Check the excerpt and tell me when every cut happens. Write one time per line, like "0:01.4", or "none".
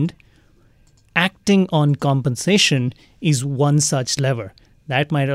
none